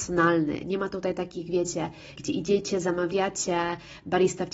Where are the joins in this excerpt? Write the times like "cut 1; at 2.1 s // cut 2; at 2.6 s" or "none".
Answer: cut 1; at 2.2 s